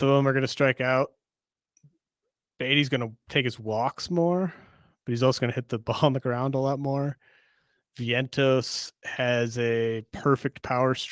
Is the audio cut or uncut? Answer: uncut